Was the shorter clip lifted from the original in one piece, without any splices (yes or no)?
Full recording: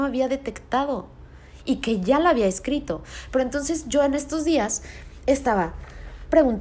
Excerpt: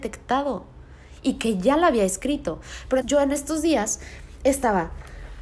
no